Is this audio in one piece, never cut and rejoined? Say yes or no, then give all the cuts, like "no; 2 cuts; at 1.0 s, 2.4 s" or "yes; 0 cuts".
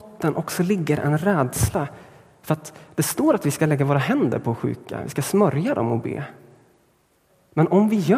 yes; 0 cuts